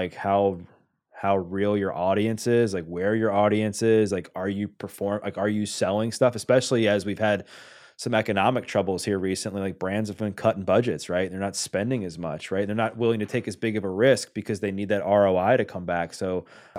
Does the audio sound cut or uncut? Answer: uncut